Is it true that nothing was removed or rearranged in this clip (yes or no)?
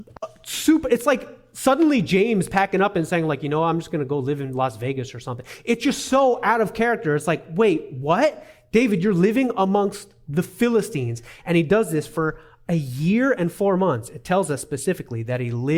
yes